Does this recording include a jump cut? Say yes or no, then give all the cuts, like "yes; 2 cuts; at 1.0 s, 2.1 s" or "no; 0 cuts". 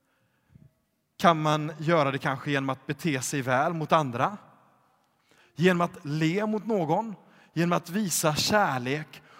no; 0 cuts